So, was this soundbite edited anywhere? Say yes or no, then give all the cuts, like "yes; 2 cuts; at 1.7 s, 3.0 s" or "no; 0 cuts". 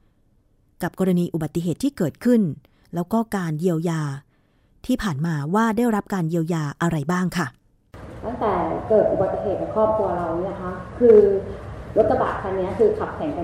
no; 0 cuts